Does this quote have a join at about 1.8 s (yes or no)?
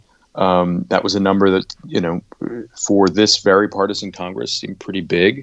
no